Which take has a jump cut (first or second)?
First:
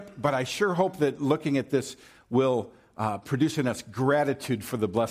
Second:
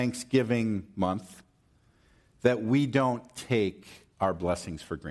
second